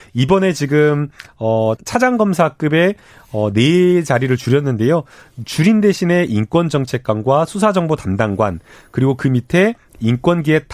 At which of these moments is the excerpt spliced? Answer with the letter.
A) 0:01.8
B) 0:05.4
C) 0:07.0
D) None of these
A